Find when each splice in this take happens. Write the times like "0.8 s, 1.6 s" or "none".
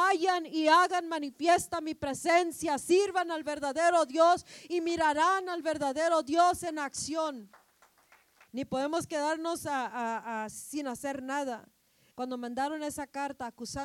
8.5 s, 12.1 s